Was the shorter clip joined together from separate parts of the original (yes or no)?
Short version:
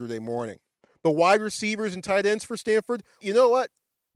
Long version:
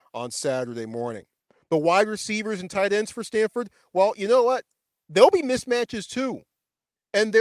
yes